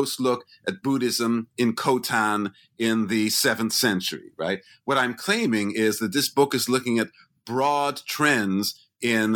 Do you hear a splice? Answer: no; 0 cuts

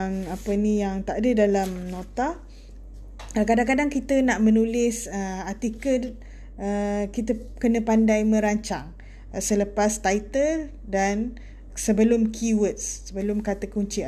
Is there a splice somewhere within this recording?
yes; 2 cuts; at 9.3 s, 11.7 s

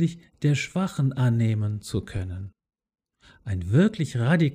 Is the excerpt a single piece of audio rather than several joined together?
yes; 0 cuts

